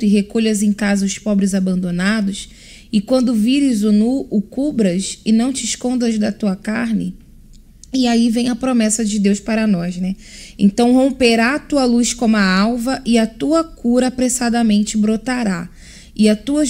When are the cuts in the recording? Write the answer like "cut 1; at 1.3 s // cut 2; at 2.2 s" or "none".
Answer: none